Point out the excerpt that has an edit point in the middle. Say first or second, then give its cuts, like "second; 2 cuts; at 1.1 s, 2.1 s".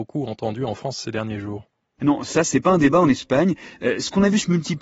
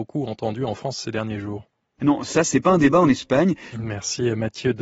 second; 1 cut; at 3.7 s